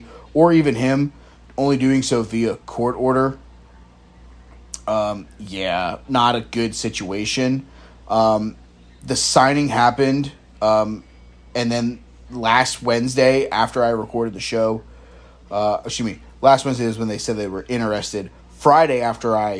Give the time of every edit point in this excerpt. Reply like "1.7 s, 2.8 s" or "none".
6.0 s